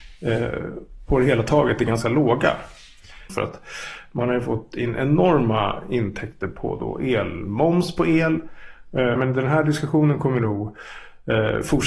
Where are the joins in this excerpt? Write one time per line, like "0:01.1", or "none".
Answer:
0:03.3
0:09.2